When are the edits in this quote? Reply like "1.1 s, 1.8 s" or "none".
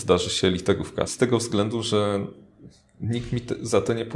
1.1 s